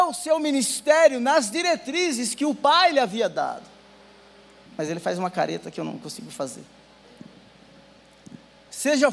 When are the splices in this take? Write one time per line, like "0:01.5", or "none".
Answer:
0:04.7